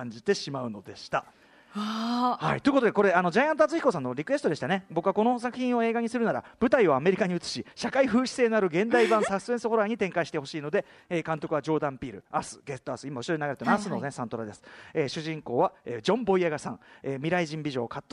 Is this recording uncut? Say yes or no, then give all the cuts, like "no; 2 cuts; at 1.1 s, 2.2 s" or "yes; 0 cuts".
yes; 0 cuts